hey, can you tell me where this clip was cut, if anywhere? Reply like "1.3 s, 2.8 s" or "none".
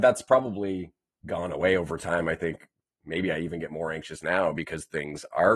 none